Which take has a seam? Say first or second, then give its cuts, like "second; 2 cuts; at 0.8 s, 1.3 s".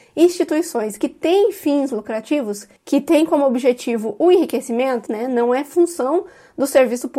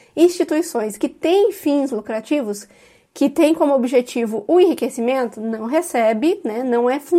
first; 2 cuts; at 2.8 s, 5.1 s